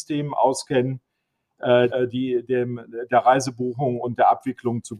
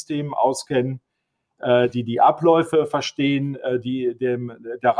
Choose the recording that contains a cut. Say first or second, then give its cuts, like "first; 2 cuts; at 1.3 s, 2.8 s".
first; 1 cut; at 1.9 s